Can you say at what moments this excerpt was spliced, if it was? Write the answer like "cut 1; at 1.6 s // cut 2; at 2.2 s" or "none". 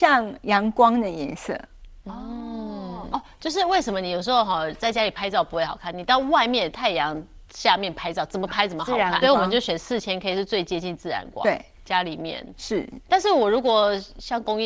cut 1; at 9.2 s

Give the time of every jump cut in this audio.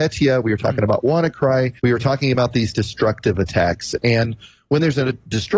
cut 1; at 1.8 s

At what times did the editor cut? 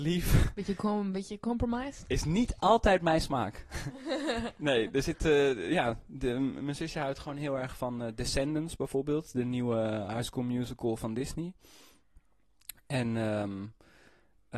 none

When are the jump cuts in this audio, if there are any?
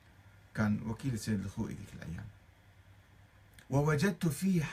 cut 1; at 3.6 s

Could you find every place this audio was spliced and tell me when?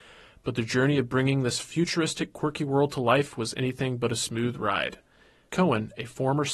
cut 1; at 5.5 s

